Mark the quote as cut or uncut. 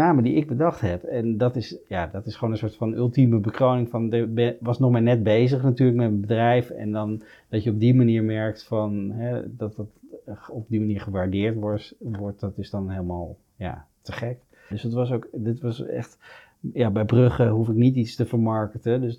cut